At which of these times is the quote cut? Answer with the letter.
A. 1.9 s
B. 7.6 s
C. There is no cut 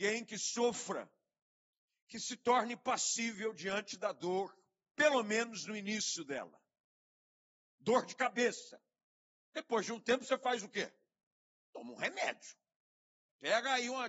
B